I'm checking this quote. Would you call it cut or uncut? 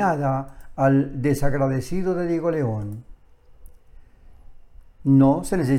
uncut